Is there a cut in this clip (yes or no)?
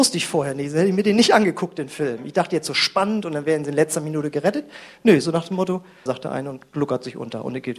yes